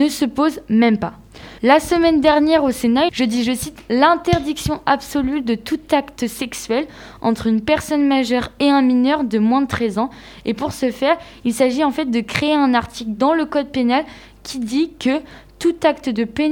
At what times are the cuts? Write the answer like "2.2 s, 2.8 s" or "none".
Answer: 1.6 s, 3.1 s